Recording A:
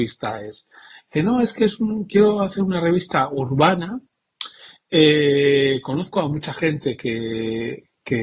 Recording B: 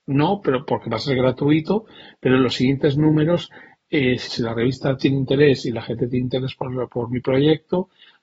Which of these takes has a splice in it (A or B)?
B